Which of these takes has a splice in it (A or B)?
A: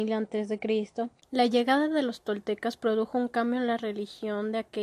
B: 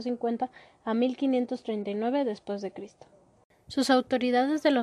A